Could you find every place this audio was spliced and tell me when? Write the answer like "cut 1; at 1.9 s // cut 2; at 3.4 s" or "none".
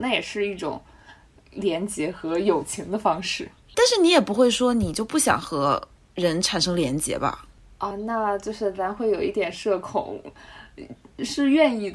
cut 1; at 3.7 s // cut 2; at 7.9 s